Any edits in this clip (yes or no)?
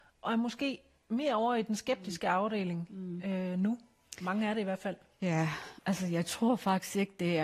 no